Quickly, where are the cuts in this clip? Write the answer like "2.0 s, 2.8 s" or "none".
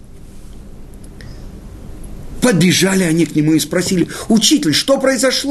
none